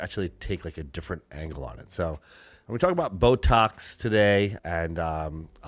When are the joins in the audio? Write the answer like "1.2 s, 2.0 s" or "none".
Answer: 4.6 s